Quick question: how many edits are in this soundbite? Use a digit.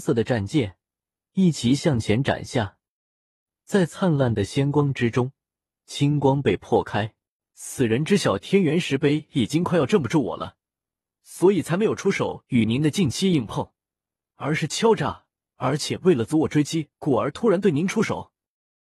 2